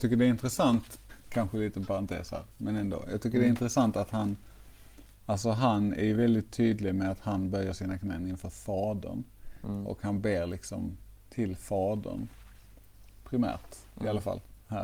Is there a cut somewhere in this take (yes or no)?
yes